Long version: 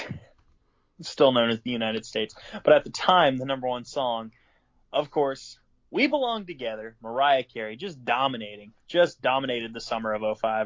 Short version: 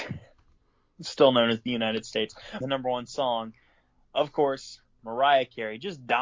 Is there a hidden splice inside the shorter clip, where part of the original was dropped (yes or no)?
yes